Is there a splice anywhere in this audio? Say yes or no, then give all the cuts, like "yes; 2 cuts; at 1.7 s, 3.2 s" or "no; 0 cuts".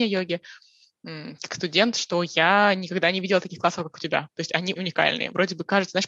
yes; 1 cut; at 4.8 s